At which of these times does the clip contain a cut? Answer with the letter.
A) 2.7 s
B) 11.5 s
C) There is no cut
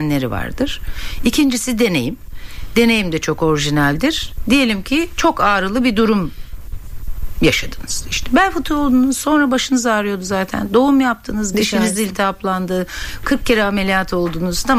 B